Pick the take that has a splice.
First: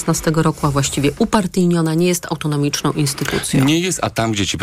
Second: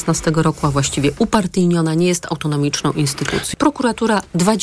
second; 1 cut; at 3.5 s

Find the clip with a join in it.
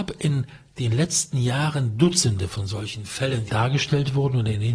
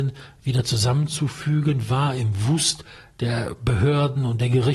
first; 1 cut; at 3.5 s

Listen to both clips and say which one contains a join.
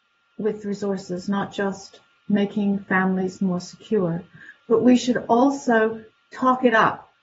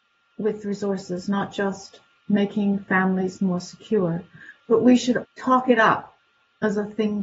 second; 1 cut; at 5.2 s

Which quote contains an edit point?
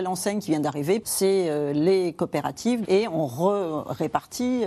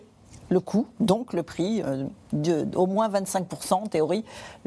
first; 2 cuts; at 1.0 s, 2.8 s

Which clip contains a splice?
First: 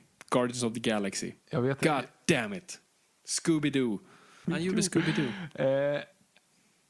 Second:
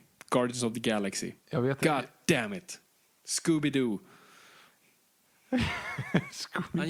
first; 1 cut; at 4.4 s

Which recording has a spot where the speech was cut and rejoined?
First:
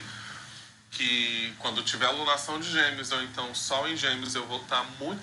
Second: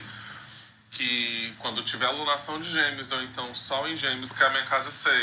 second; 1 cut; at 4.3 s

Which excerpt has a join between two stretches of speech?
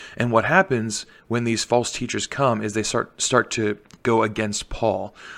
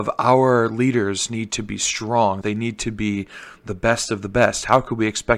second; 1 cut; at 2.4 s

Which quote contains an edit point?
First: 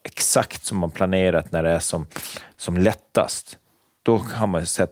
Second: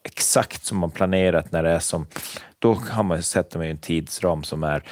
second; 1 cut; at 2.5 s

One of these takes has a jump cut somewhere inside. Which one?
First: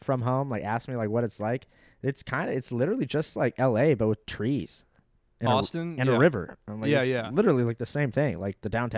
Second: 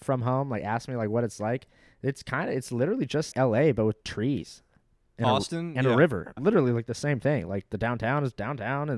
second; 2 cuts; at 3.3 s, 6.4 s

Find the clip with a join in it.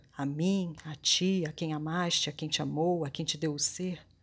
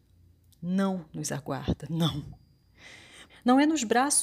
second; 1 cut; at 3.3 s

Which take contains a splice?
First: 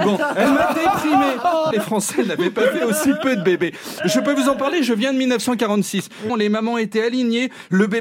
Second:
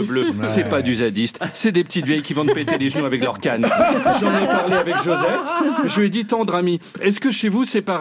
first; 2 cuts; at 1.7 s, 6.3 s

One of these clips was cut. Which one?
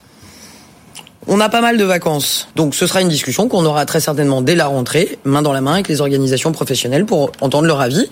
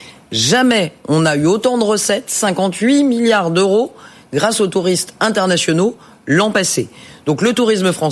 first; 1 cut; at 2.5 s

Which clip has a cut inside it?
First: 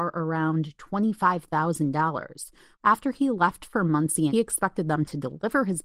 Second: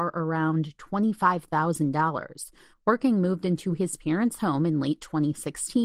first; 2 cuts; at 2.7 s, 4.3 s

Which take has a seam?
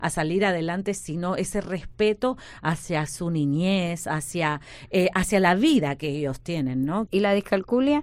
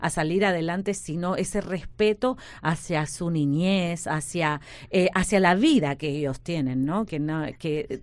first; 1 cut; at 7.1 s

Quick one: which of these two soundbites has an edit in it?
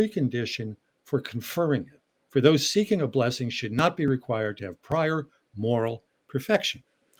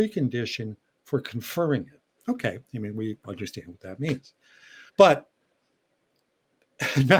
second; 2 cuts; at 2.2 s, 4.9 s

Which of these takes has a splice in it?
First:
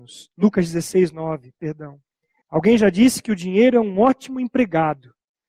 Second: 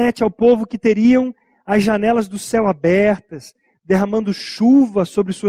first; 1 cut; at 2.4 s

